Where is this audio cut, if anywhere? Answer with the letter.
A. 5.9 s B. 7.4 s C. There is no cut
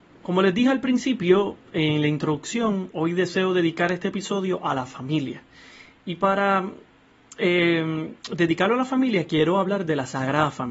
C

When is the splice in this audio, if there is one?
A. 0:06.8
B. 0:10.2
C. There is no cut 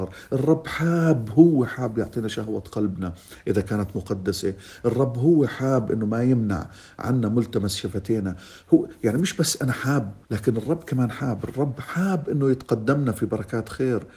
B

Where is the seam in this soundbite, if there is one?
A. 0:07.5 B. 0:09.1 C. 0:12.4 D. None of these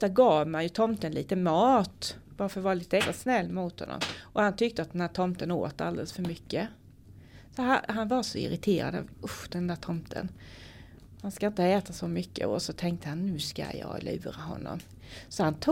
B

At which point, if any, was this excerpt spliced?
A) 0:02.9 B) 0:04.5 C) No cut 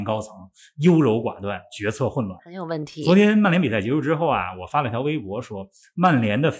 C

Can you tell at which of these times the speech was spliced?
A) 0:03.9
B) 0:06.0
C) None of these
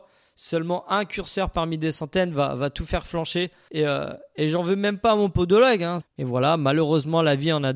B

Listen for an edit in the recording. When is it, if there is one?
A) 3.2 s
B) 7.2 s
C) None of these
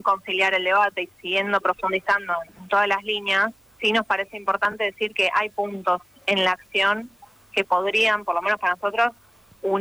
C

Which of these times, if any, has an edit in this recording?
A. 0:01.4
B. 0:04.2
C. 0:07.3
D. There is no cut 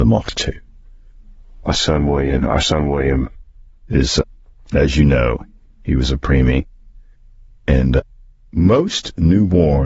D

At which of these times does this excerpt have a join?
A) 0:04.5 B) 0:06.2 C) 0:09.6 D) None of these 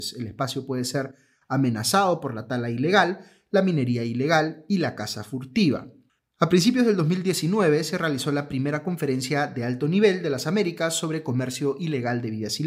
B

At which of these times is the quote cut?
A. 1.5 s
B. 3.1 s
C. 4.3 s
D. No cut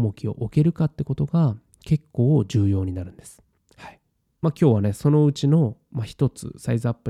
C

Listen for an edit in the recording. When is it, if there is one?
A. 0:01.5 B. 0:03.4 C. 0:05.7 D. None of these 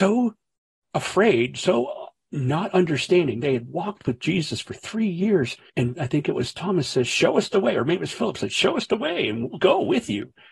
C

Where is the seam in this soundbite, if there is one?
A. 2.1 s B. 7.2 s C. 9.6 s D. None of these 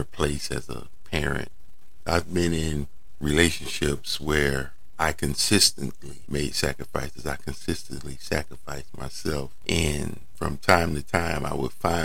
A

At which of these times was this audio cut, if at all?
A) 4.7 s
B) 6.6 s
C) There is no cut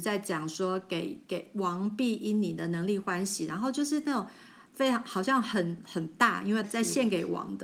B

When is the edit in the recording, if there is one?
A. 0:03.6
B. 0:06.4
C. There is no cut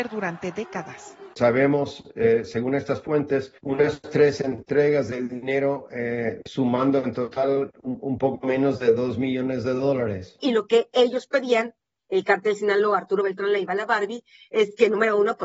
A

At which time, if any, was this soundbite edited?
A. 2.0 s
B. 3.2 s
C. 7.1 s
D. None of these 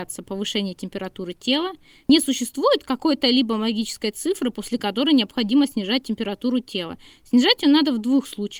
D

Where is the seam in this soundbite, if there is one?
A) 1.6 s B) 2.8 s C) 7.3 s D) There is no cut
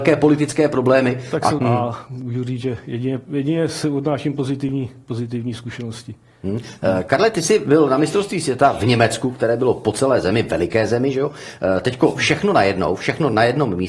A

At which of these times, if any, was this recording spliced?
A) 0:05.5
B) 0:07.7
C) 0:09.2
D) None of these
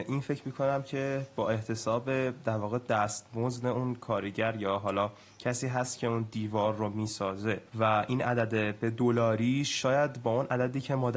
B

